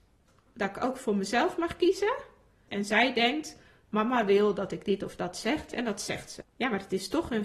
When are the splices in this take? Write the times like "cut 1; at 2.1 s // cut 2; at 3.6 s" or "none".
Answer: cut 1; at 2.7 s // cut 2; at 6.4 s

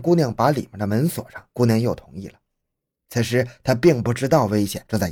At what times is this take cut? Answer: none

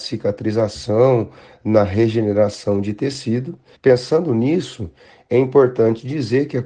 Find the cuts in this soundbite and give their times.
cut 1; at 3.7 s

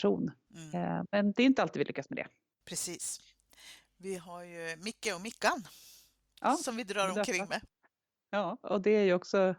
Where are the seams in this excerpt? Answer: cut 1; at 2.5 s // cut 2; at 8.6 s

